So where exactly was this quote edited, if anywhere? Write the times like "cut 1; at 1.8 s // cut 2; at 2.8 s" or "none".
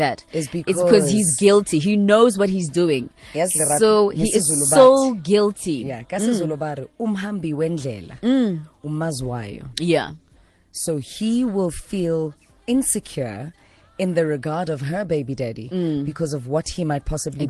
none